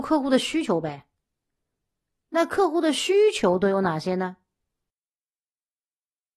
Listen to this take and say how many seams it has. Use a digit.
0